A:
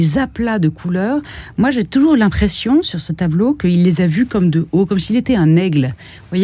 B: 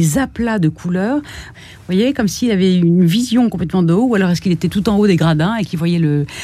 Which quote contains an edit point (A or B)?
B